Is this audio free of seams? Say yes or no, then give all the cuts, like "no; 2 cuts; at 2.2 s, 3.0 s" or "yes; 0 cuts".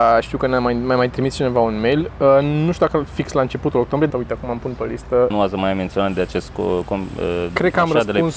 no; 2 cuts; at 4.1 s, 5.3 s